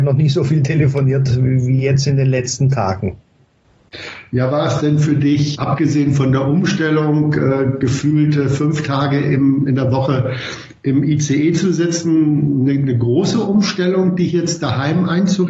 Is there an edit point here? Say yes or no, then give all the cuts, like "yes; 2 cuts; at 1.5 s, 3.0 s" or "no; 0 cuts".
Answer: yes; 1 cut; at 5.6 s